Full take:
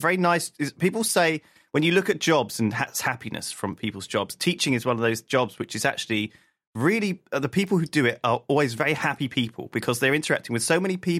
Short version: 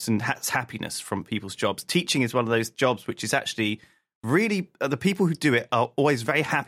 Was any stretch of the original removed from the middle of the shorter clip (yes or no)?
no